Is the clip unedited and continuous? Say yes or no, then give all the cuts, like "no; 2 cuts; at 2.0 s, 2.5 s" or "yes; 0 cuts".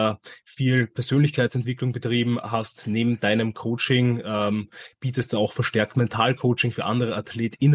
yes; 0 cuts